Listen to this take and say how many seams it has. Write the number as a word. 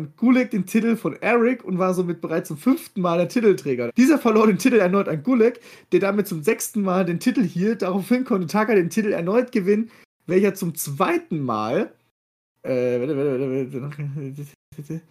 one